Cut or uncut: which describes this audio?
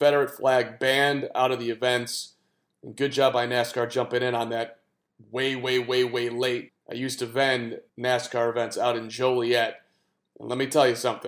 cut